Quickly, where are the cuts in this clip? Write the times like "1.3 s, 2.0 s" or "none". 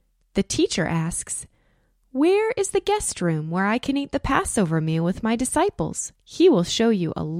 6.1 s